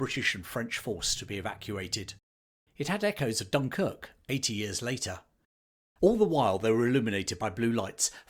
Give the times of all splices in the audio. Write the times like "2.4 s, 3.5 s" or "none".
2.7 s